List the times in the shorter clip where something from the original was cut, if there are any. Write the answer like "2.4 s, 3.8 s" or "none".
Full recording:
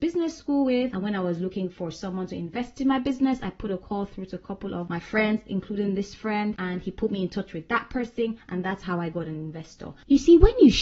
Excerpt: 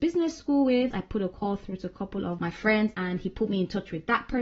0.9 s, 2.9 s